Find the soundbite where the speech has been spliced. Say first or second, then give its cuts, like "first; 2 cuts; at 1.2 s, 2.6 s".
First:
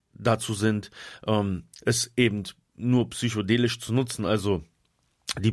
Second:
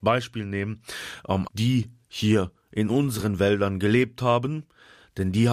second; 1 cut; at 1.4 s